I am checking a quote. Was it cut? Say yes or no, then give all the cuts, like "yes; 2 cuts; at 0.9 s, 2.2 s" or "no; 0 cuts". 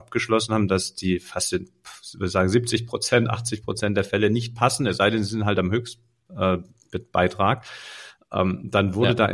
no; 0 cuts